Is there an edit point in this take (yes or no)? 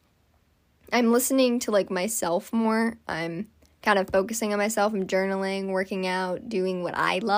no